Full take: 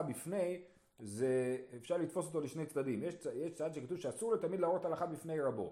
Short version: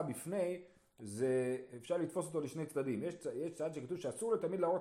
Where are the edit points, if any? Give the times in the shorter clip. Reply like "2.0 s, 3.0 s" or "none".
none